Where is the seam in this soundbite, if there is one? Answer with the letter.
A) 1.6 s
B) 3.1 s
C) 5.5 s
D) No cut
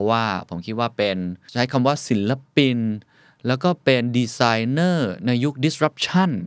D